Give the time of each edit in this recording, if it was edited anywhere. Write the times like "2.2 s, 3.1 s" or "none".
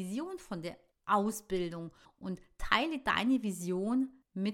none